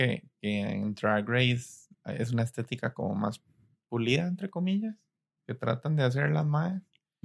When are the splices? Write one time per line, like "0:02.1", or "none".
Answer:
0:01.9